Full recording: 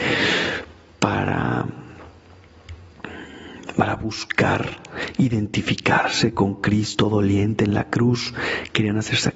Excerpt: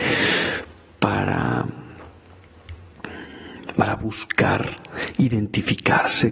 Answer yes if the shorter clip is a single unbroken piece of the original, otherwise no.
yes